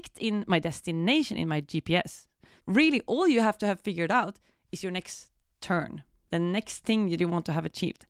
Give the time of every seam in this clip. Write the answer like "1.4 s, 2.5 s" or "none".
2.6 s, 6.3 s